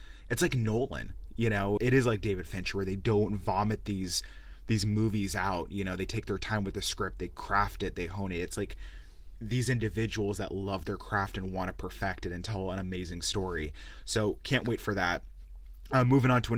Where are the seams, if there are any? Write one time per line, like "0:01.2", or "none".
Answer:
0:01.8